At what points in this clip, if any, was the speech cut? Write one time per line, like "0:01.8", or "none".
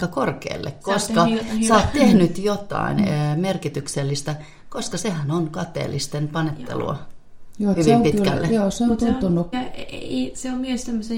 0:09.5